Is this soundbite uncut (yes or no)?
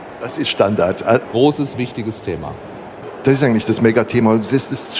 no